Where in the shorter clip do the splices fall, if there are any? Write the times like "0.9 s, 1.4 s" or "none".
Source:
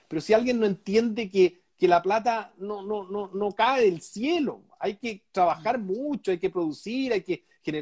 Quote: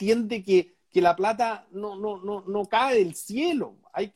none